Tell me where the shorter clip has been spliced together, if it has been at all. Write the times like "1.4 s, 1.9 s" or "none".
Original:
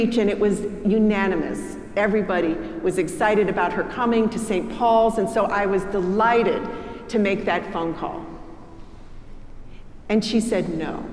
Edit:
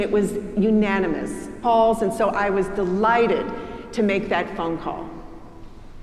1.6 s